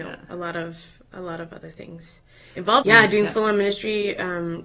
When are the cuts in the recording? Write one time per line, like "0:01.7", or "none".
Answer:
0:02.8